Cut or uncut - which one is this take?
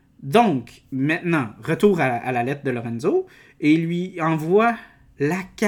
uncut